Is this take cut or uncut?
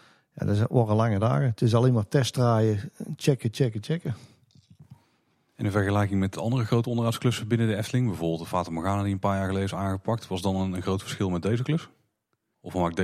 uncut